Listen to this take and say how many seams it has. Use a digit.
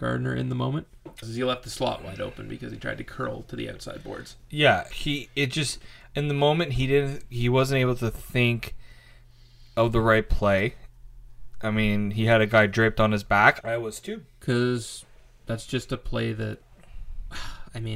3